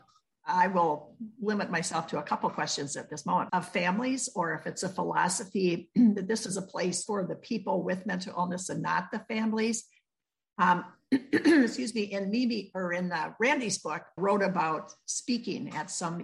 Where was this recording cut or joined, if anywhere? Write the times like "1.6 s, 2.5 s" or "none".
3.5 s, 7.1 s, 14.2 s